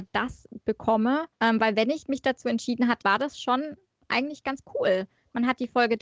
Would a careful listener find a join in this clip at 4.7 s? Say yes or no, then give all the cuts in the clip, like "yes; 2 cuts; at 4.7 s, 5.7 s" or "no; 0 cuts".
no; 2 cuts; at 1.3 s, 3.0 s